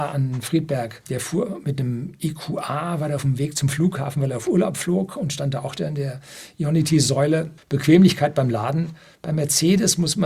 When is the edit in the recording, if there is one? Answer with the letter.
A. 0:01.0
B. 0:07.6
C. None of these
B